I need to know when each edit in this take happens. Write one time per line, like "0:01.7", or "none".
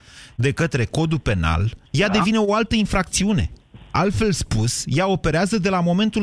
0:01.9